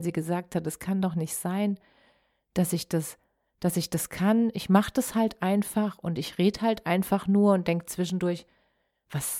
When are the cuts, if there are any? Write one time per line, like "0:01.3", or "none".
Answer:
none